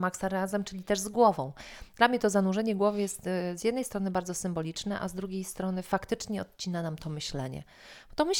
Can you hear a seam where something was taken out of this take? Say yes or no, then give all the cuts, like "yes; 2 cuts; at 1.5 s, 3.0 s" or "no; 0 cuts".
no; 0 cuts